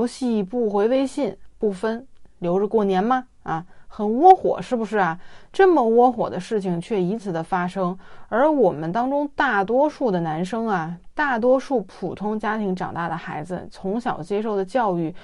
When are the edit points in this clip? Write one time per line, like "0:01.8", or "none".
0:07.2
0:11.1